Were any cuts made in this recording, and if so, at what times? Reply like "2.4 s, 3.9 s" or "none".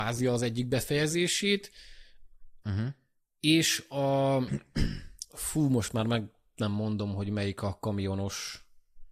2.6 s